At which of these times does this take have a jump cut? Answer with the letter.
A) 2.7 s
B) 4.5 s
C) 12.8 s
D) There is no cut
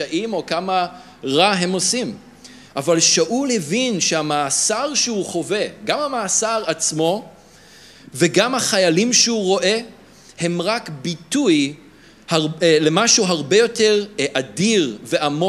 A